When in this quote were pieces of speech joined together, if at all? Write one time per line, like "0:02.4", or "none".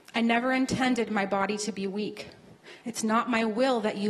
none